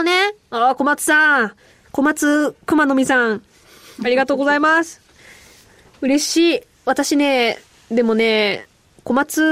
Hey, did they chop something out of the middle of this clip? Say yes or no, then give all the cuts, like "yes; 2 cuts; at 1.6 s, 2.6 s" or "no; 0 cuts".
no; 0 cuts